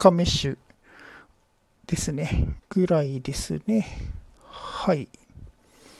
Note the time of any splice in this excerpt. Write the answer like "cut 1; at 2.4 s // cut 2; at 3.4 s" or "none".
cut 1; at 2.6 s